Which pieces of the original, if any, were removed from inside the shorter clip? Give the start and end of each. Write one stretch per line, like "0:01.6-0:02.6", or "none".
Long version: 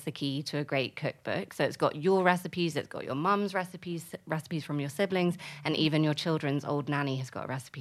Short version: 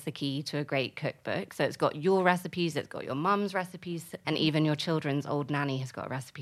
0:04.2-0:05.6